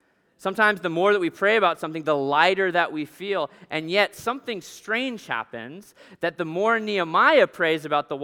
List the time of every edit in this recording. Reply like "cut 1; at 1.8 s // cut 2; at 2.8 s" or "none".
none